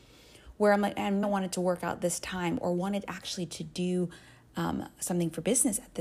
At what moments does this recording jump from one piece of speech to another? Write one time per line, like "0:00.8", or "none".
0:01.2